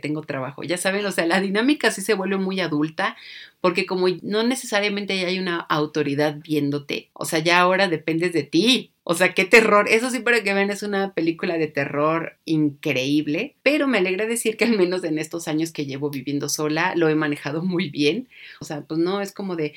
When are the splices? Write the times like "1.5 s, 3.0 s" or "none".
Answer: 9.0 s, 18.6 s